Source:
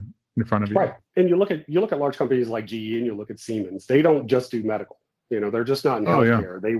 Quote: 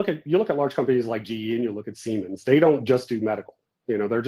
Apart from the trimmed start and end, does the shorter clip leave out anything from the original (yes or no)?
no